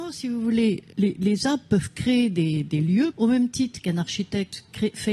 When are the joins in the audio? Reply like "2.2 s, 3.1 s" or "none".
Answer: 0.9 s, 3.1 s

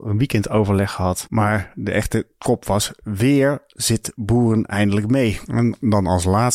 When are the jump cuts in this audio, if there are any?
1.3 s

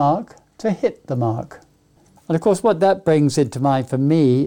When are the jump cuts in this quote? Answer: 2.2 s

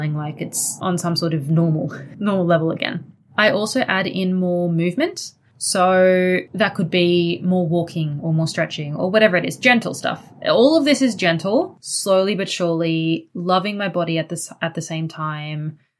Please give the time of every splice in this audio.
11.8 s

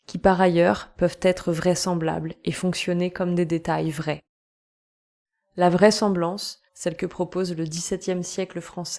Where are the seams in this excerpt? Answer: 6.7 s

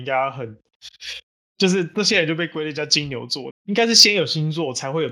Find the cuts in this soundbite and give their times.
3.5 s

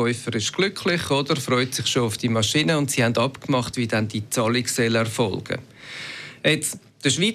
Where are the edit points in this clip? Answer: none

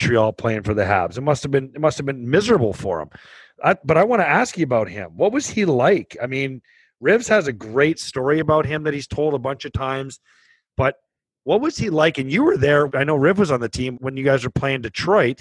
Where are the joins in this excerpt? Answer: 12.9 s, 13.9 s

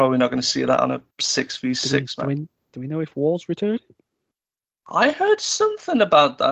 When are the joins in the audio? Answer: 1.1 s

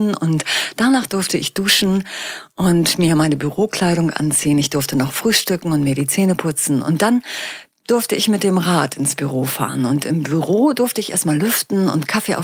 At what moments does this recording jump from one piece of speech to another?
none

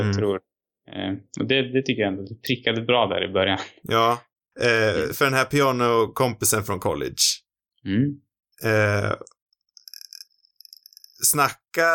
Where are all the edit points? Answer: 4.5 s, 8.5 s

